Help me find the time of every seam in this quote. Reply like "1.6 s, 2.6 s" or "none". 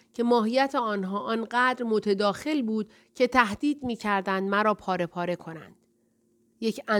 none